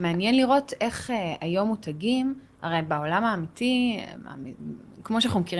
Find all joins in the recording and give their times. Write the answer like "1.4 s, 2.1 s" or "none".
none